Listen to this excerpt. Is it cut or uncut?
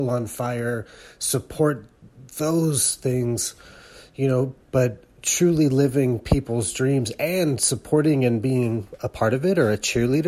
cut